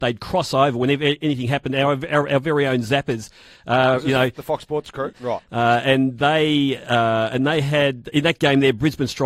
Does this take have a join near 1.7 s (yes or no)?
no